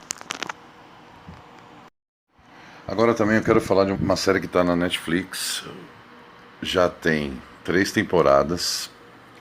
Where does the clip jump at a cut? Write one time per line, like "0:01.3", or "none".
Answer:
0:03.9